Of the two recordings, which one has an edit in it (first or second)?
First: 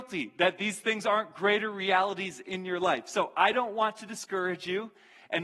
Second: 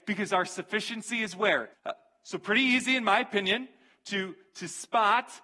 second